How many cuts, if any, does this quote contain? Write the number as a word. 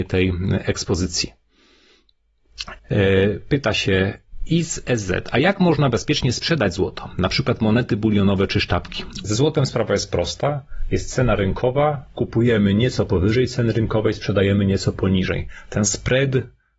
two